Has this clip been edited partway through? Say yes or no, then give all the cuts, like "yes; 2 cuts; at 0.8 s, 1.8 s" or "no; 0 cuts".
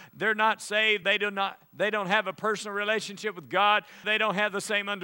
yes; 2 cuts; at 1.0 s, 4.0 s